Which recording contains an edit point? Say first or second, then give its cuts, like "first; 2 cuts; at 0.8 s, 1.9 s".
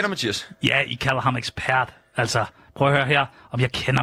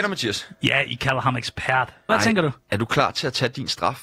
second; 1 cut; at 2.1 s